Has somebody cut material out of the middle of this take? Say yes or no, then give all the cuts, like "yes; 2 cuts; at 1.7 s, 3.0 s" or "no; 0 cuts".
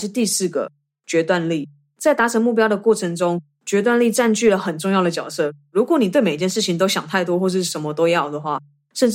no; 0 cuts